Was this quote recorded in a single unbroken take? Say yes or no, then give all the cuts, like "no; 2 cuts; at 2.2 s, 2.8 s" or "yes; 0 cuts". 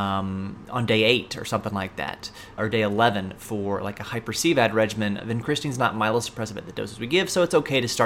no; 2 cuts; at 2.6 s, 5.2 s